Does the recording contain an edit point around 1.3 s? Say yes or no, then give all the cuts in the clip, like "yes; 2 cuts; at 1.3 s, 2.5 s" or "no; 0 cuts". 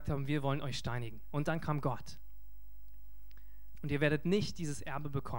no; 1 cut; at 3.7 s